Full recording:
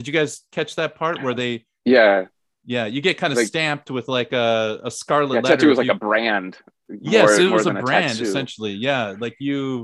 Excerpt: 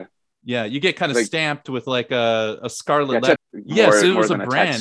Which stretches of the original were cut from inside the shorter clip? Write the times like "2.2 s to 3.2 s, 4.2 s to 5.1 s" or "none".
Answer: 5.6 s to 6.7 s